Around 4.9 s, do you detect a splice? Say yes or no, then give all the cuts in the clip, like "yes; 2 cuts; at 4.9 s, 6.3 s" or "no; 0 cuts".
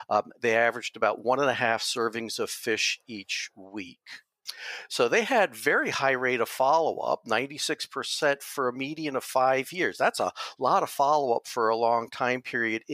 no; 0 cuts